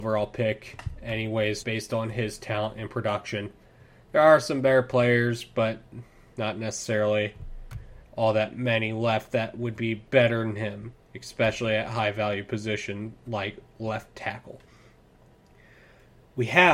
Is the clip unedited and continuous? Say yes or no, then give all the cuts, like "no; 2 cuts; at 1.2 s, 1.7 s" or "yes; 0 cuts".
no; 1 cut; at 1.6 s